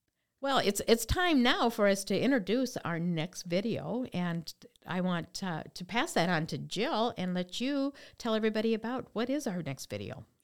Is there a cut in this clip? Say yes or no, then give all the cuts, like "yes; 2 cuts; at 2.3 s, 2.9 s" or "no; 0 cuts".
no; 0 cuts